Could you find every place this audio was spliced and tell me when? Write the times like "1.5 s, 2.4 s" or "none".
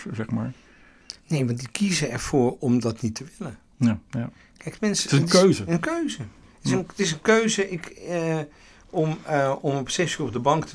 1.2 s, 4.0 s